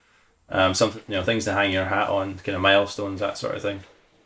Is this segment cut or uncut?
uncut